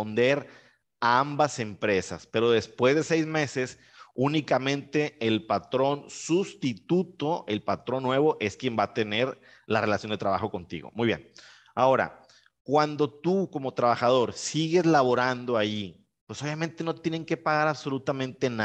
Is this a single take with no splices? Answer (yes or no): yes